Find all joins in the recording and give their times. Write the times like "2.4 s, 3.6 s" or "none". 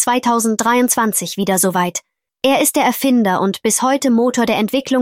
2.3 s